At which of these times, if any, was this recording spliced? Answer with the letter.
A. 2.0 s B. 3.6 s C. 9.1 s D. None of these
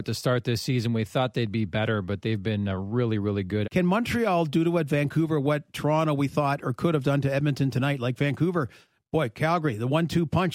B